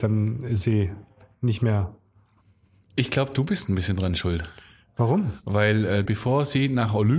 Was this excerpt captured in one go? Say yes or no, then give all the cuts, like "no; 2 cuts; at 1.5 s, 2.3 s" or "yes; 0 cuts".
no; 1 cut; at 6.1 s